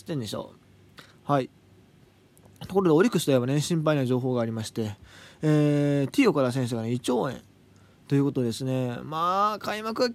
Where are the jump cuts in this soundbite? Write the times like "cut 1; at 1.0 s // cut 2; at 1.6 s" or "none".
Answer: cut 1; at 1.1 s